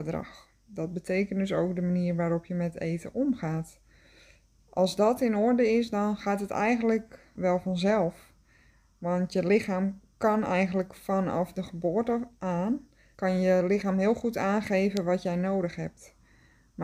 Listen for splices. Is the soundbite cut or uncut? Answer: cut